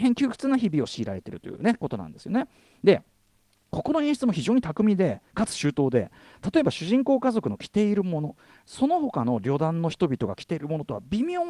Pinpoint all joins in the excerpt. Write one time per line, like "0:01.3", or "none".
none